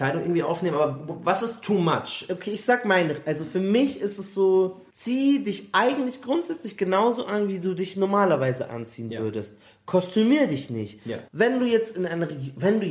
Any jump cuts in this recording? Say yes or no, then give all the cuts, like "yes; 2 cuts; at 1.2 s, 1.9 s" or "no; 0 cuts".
yes; 1 cut; at 11.3 s